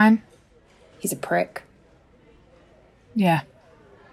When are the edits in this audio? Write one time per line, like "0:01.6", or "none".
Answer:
0:00.9